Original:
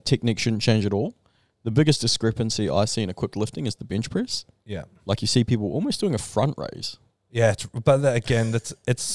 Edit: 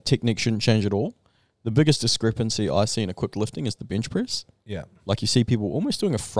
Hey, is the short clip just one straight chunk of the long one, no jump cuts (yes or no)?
yes